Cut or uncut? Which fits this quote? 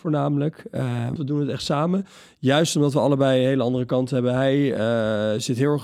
cut